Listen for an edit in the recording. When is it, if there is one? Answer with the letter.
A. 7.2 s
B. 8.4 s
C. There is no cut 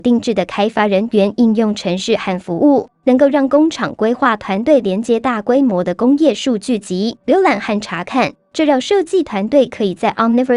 A